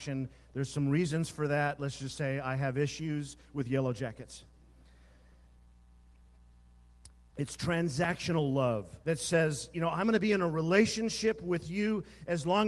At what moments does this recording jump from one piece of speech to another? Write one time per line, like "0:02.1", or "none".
0:07.3
0:09.0